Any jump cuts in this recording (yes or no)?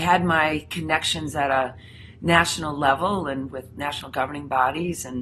no